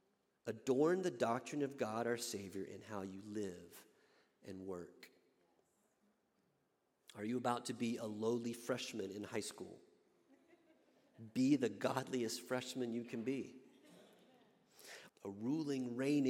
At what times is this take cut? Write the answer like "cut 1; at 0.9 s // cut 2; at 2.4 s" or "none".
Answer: cut 1; at 15.1 s